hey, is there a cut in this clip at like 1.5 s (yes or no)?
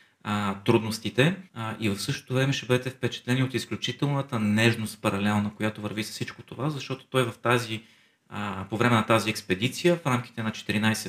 yes